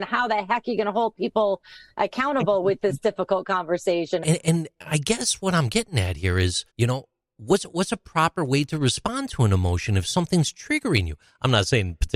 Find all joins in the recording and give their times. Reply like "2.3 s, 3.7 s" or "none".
4.2 s, 6.7 s